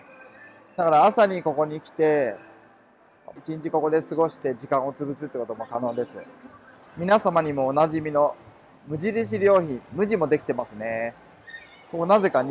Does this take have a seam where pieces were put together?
yes; 1 cut; at 3.4 s

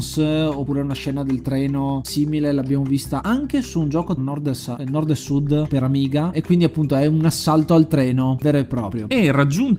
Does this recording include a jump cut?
yes; 1 cut; at 4.2 s

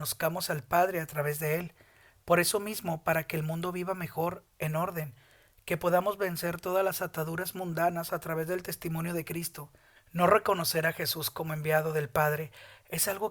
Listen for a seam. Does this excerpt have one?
yes; 1 cut; at 10.0 s

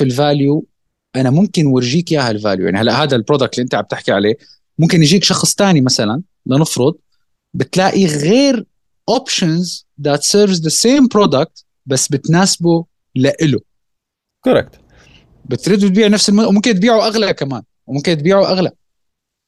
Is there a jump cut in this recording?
no; 0 cuts

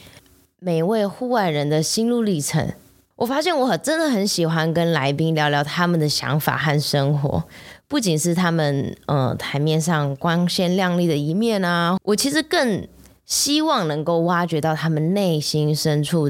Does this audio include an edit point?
yes; 2 cuts; at 3.1 s, 12.0 s

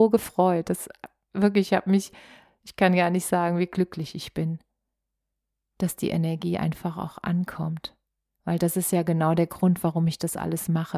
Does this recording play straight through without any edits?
yes; 0 cuts

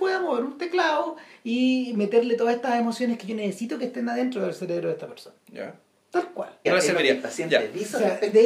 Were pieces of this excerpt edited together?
yes; 2 cuts; at 5.4 s, 6.7 s

